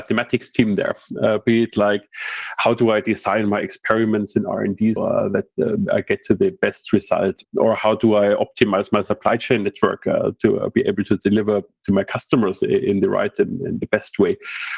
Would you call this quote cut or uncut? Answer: cut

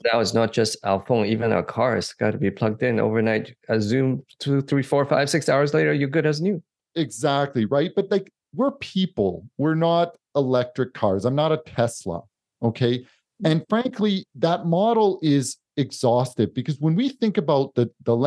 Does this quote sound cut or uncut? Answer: uncut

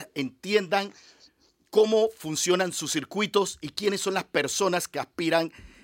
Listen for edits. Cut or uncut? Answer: uncut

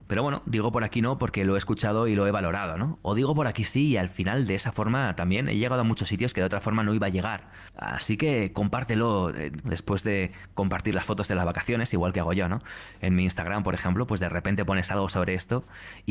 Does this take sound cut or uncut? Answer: cut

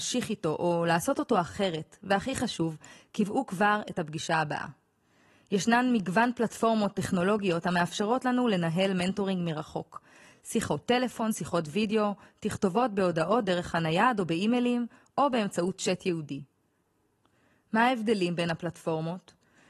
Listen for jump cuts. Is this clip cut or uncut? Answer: uncut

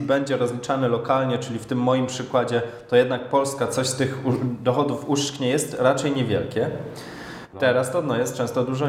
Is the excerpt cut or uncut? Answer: cut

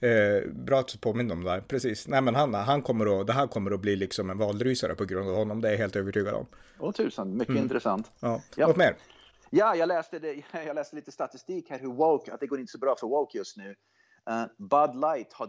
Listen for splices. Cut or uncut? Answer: uncut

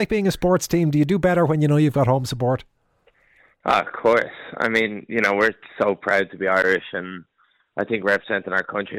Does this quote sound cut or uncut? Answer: uncut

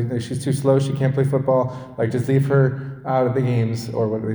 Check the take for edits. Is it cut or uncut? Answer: uncut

